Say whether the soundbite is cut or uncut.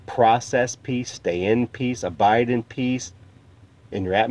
uncut